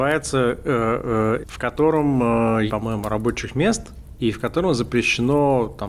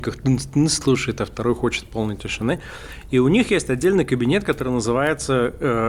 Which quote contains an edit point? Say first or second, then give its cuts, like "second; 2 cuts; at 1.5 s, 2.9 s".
first; 2 cuts; at 1.4 s, 2.7 s